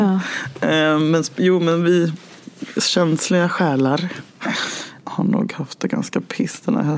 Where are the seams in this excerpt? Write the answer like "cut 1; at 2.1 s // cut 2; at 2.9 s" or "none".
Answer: cut 1; at 5.0 s